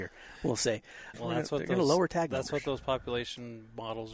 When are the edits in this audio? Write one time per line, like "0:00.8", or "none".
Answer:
0:01.1